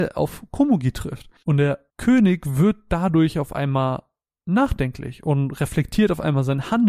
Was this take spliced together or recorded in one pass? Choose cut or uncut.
cut